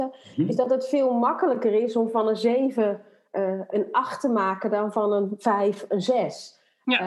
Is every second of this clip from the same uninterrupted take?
yes; 0 cuts

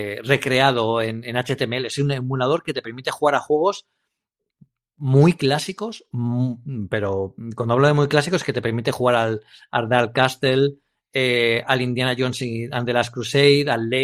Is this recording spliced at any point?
no; 0 cuts

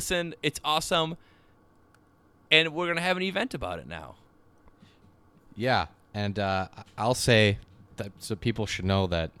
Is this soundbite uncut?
yes; 0 cuts

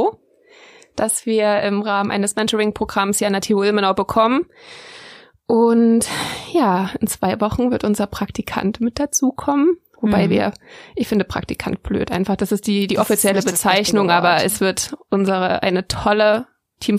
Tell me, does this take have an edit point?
no; 0 cuts

